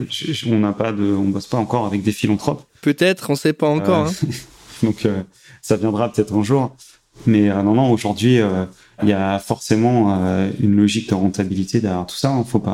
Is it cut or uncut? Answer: uncut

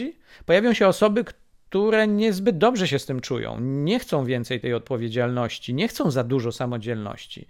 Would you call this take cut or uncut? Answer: uncut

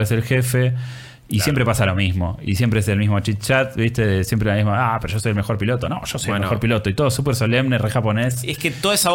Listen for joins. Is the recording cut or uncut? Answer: uncut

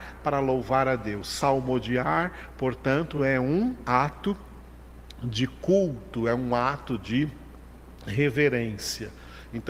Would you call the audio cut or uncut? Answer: uncut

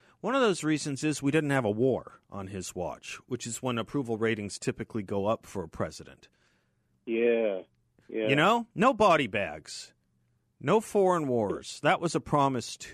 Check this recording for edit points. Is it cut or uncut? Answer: uncut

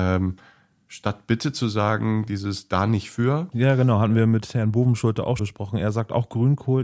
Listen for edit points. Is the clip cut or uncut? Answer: cut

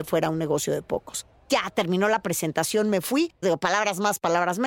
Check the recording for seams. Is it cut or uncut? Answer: cut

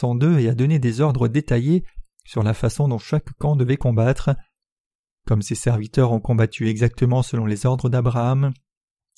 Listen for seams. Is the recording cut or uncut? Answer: uncut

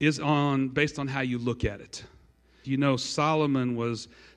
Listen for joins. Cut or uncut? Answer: cut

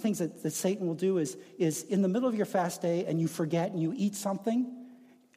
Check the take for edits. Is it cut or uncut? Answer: uncut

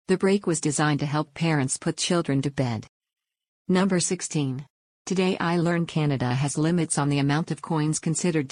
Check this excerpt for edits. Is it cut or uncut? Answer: uncut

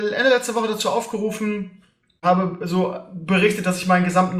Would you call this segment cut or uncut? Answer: cut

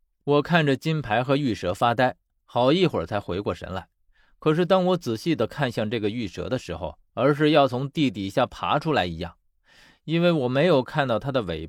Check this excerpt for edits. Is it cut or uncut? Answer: cut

